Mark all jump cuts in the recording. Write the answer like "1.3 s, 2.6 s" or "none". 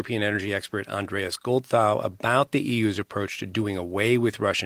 none